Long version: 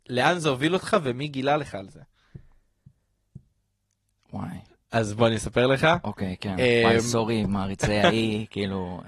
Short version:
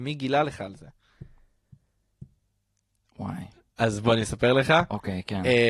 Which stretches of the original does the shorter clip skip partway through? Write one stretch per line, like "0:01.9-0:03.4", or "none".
none